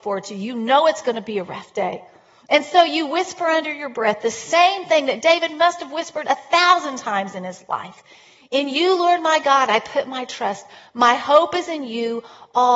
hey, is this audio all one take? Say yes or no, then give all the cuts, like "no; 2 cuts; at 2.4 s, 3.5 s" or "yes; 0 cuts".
yes; 0 cuts